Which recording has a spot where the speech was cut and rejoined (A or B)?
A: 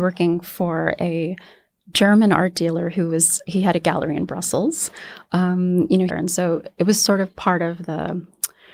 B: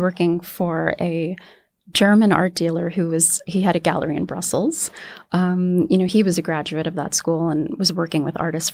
A